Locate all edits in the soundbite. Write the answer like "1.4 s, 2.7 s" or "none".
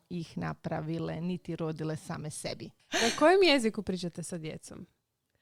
2.8 s